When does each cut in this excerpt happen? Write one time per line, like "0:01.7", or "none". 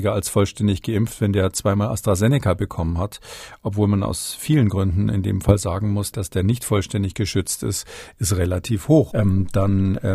0:06.1
0:09.1